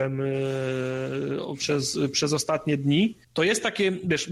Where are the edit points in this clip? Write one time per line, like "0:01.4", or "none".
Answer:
0:03.2